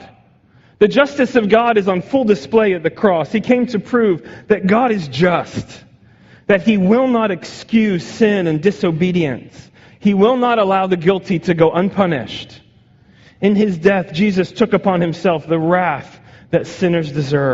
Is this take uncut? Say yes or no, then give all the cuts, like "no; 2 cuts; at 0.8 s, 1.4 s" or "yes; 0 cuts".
yes; 0 cuts